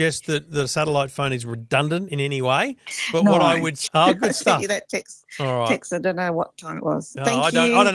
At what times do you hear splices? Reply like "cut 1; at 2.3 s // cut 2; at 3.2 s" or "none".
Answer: cut 1; at 3.9 s